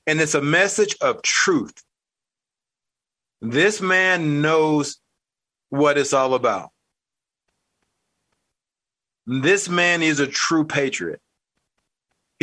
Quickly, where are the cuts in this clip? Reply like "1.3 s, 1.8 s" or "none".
3.3 s